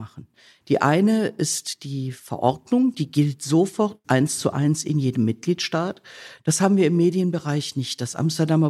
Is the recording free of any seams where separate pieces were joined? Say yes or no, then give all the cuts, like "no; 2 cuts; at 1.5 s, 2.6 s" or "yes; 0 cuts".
no; 2 cuts; at 4.0 s, 6.4 s